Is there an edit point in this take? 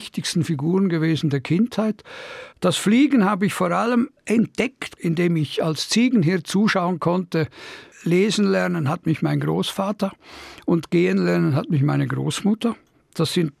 yes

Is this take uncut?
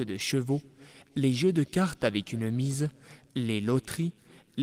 yes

